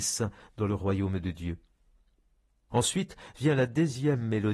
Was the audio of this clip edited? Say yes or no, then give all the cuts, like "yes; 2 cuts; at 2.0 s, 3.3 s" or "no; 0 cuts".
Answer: yes; 1 cut; at 2.7 s